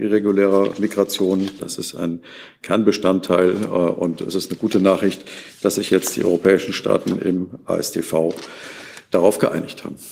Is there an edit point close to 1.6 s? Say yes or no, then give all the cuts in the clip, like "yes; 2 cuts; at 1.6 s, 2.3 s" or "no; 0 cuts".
yes; 1 cut; at 1.6 s